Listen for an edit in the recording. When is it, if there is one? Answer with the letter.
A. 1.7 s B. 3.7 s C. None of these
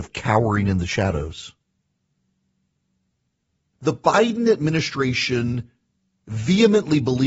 B